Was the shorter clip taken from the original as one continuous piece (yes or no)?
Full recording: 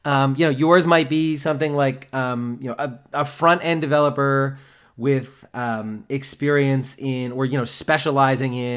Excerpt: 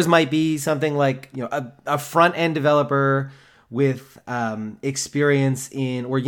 no